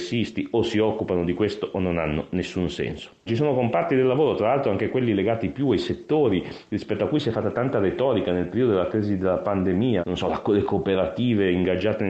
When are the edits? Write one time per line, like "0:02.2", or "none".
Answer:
0:03.3
0:10.0